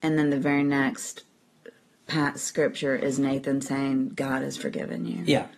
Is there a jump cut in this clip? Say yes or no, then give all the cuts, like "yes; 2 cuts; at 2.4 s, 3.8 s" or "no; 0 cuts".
no; 0 cuts